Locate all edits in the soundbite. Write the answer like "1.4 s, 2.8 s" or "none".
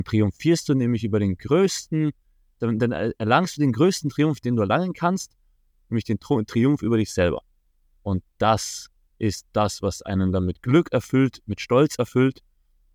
none